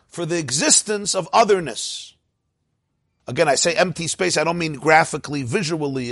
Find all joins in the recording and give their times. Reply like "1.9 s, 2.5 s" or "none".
3.2 s

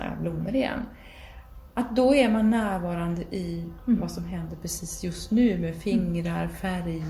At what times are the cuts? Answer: none

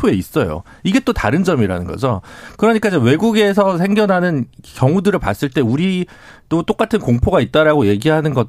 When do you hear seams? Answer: none

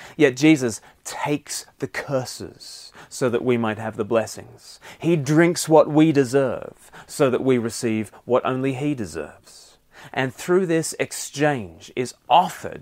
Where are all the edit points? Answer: none

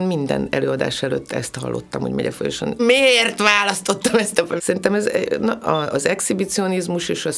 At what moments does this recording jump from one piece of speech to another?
2.8 s, 4.6 s

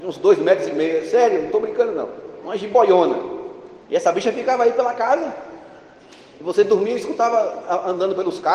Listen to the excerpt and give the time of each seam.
3.8 s

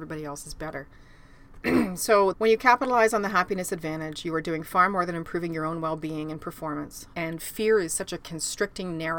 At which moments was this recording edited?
2.3 s, 7.1 s

